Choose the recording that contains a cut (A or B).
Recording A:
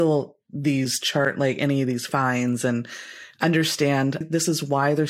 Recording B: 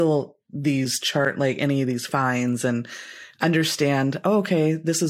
A